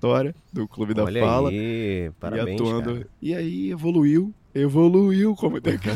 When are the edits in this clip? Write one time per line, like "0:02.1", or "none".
0:03.2
0:04.4